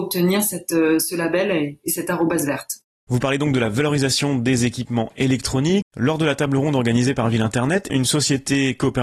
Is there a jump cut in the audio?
yes; 2 cuts; at 5.8 s, 7.9 s

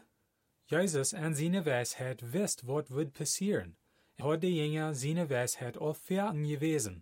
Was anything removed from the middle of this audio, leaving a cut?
yes; 1 cut; at 4.2 s

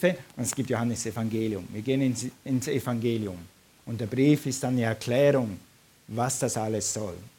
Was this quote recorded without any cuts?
no; 1 cut; at 3.8 s

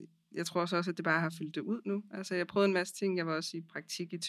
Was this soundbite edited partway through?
no; 0 cuts

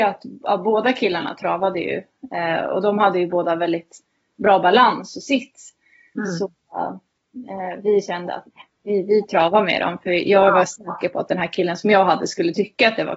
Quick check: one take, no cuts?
yes; 0 cuts

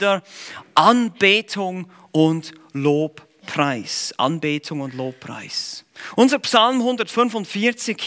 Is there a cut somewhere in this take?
no; 0 cuts

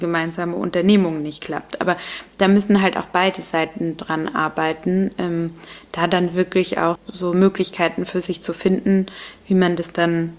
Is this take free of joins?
no; 1 cut; at 7.0 s

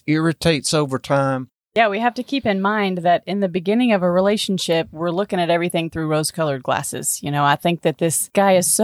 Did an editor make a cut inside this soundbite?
yes; 1 cut; at 1.6 s

